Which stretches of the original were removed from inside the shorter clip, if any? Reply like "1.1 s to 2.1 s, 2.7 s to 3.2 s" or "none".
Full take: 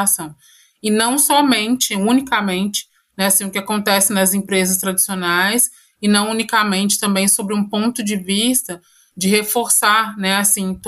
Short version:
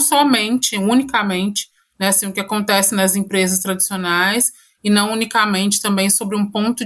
none